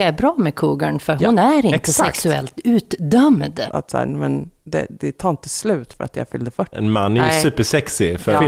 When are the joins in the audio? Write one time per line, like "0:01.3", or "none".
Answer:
0:03.7
0:06.7